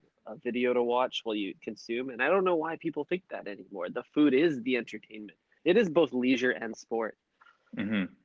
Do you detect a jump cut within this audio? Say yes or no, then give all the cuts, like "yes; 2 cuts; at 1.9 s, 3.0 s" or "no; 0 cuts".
no; 0 cuts